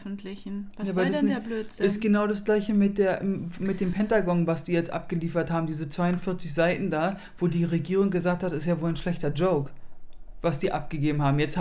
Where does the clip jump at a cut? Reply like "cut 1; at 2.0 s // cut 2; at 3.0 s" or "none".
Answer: none